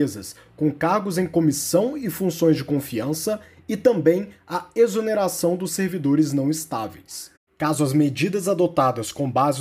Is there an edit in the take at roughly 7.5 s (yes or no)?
yes